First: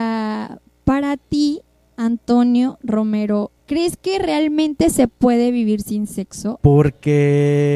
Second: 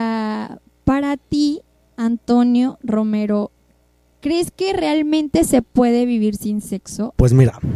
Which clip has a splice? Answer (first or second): first